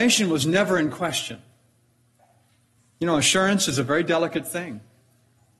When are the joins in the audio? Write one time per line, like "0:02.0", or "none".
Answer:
0:02.8